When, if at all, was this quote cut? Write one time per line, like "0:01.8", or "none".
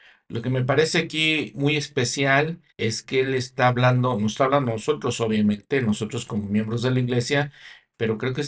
0:01.5
0:02.7